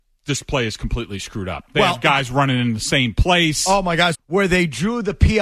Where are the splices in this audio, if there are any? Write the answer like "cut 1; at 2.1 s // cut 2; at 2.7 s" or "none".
cut 1; at 4.1 s